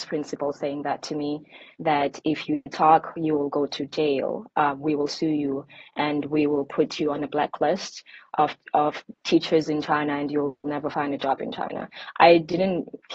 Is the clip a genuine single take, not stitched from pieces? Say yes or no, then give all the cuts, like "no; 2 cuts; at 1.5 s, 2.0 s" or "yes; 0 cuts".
yes; 0 cuts